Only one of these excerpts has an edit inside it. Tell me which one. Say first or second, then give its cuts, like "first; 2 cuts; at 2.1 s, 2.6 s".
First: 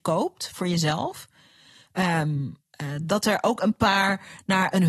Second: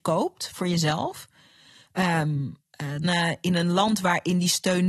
second; 1 cut; at 3.0 s